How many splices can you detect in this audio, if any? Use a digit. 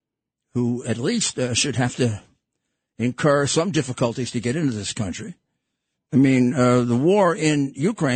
1